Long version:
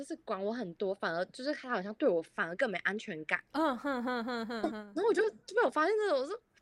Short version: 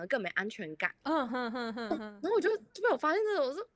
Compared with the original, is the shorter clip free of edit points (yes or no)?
no